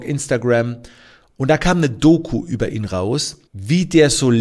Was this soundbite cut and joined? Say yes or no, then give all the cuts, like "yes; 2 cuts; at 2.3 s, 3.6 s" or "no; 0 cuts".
yes; 1 cut; at 3.5 s